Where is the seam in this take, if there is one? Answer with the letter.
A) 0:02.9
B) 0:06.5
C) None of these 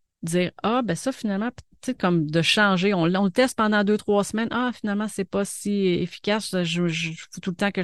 C